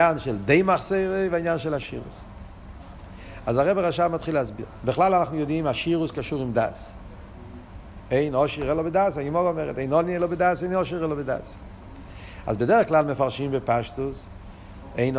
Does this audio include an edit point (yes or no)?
no